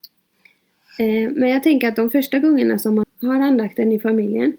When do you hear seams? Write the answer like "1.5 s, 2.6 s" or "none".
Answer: 3.0 s